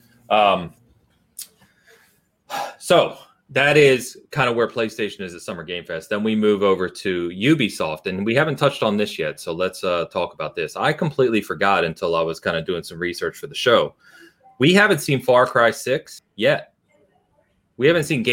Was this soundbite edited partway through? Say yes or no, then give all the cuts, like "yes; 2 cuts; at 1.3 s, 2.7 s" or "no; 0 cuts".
no; 0 cuts